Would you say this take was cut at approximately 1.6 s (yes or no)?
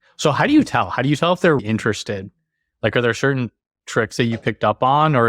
yes